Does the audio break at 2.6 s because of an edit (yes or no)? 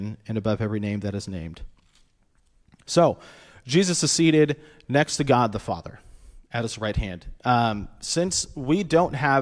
no